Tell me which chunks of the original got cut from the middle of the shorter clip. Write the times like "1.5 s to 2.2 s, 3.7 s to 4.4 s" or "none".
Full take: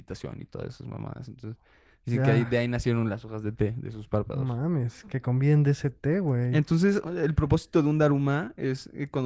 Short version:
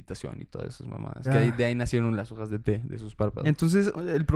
1.2 s to 2.2 s, 4.4 s to 6.5 s